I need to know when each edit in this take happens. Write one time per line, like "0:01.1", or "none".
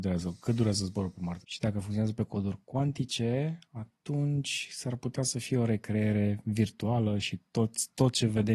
0:01.4